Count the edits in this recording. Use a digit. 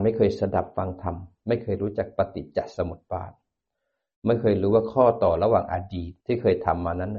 1